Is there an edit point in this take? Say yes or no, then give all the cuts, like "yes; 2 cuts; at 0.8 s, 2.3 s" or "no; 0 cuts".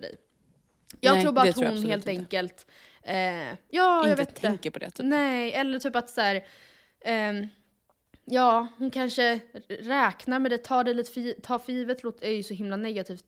no; 0 cuts